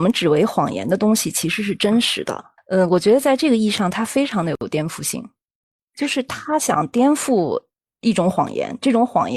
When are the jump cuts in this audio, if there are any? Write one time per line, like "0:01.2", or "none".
none